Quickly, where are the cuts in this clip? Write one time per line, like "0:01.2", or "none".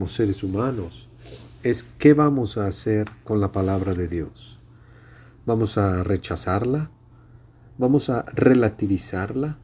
none

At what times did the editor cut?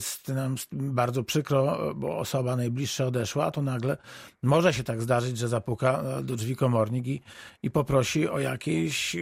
none

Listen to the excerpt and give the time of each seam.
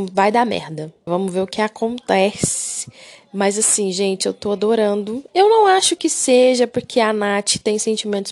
0:01.1
0:05.3

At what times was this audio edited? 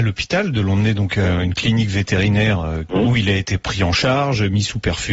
0:02.9

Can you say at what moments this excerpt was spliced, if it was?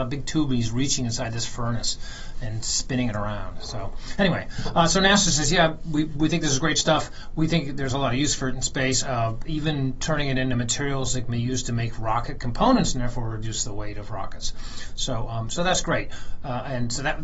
none

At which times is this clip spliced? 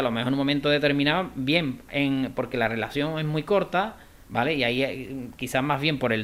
none

